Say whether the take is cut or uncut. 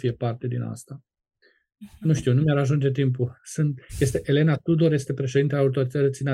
uncut